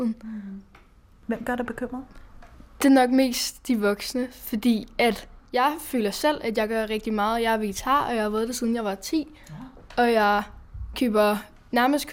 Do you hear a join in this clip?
no; 0 cuts

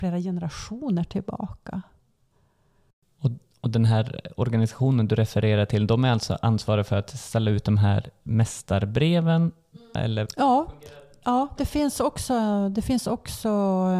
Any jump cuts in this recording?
yes; 1 cut; at 10.0 s

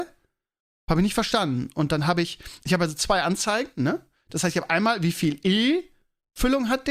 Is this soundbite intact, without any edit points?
yes; 0 cuts

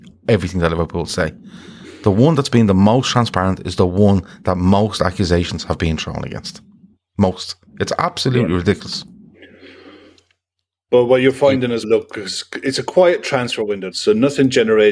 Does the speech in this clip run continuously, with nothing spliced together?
no; 2 cuts; at 11.8 s, 13.9 s

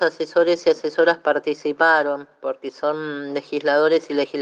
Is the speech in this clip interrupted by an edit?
no; 0 cuts

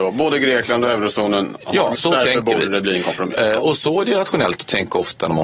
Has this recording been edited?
yes; 1 cut; at 1.9 s

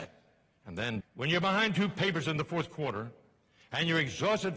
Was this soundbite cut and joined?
yes; 1 cut; at 1.0 s

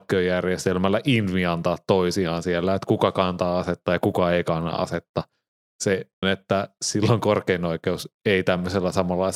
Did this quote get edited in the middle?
yes; 1 cut; at 6.2 s

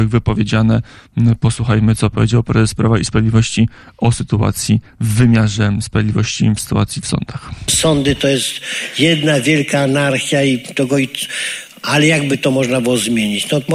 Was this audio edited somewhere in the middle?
no; 0 cuts

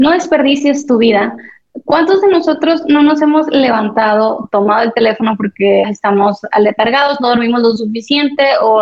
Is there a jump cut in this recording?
yes; 1 cut; at 5.8 s

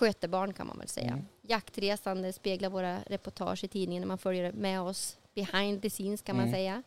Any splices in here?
no; 0 cuts

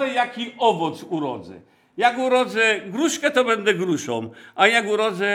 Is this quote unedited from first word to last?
yes; 0 cuts

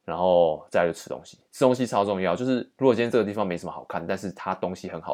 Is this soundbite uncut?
yes; 0 cuts

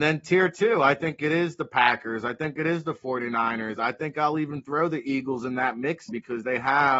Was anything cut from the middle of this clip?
yes; 1 cut; at 6.1 s

